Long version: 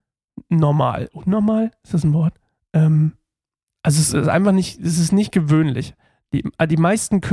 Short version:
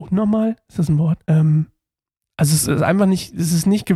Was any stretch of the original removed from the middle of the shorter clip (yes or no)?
yes